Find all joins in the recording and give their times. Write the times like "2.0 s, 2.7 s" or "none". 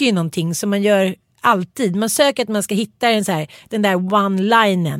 none